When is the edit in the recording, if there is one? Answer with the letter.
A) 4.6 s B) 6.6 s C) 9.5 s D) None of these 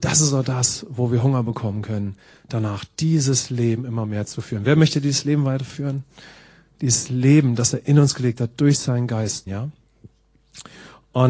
C